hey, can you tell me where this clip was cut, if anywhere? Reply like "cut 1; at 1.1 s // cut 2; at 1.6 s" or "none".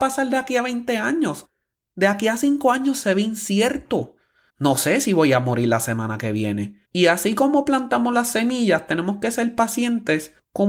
cut 1; at 4.5 s // cut 2; at 6.9 s